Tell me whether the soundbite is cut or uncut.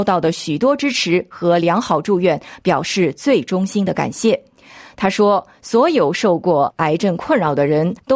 uncut